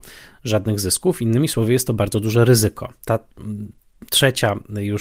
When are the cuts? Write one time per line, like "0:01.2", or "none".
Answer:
0:03.0